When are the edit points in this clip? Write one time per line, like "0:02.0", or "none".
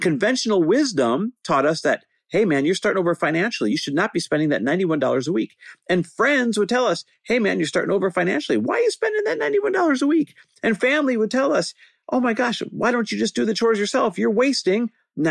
none